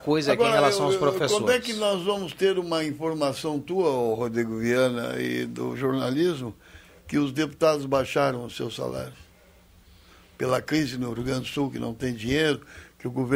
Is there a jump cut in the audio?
no; 0 cuts

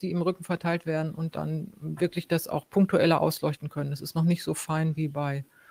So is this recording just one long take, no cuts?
yes; 0 cuts

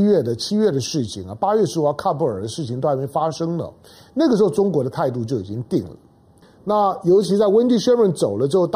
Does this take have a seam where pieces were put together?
yes; 1 cut; at 6.4 s

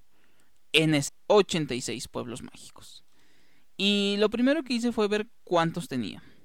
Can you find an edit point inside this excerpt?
yes; 1 cut; at 1.1 s

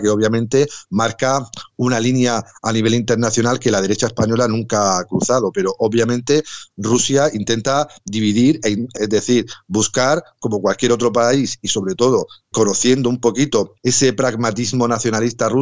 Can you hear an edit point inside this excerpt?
yes; 2 cuts; at 9.0 s, 12.5 s

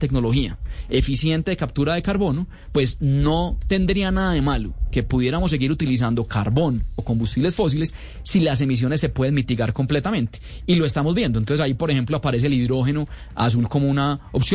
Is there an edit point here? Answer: no; 0 cuts

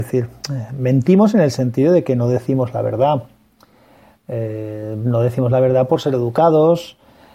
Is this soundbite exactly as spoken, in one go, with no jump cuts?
yes; 0 cuts

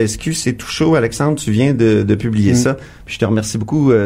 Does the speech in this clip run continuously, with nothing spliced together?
yes; 0 cuts

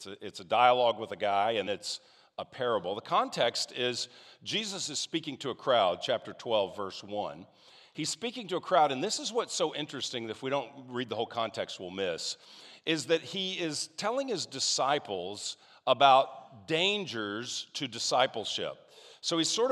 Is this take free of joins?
no; 1 cut; at 1.7 s

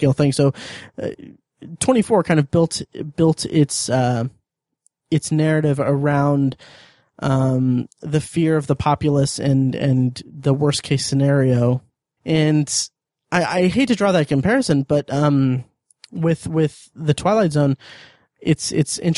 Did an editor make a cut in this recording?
yes; 1 cut; at 12.2 s

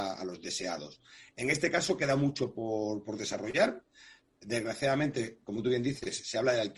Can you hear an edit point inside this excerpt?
no; 0 cuts

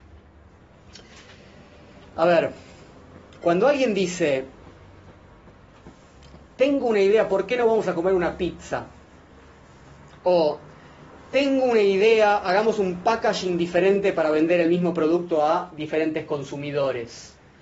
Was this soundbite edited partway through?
no; 0 cuts

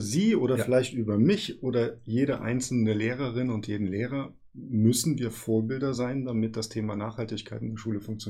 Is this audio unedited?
yes; 0 cuts

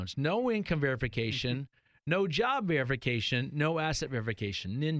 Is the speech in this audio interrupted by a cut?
no; 0 cuts

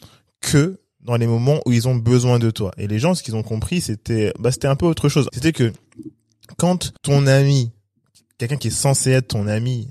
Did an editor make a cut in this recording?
yes; 2 cuts; at 5.3 s, 7.0 s

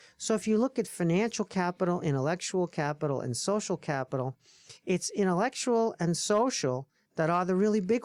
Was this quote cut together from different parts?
no; 0 cuts

